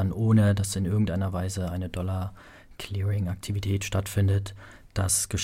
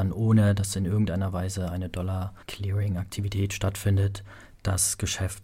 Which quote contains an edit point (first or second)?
second